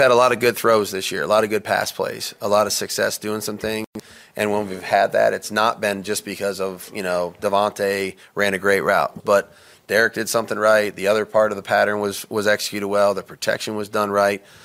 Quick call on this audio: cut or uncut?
cut